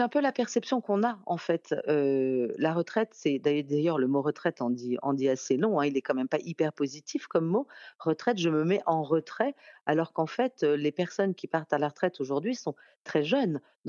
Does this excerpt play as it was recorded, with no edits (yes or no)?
yes